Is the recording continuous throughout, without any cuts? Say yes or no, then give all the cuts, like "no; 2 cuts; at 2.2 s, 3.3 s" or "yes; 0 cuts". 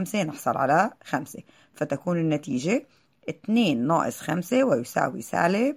yes; 0 cuts